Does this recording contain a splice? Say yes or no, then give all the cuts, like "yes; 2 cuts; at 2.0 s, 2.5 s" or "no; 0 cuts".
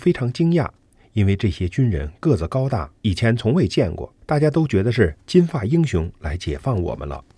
yes; 2 cuts; at 3.0 s, 4.2 s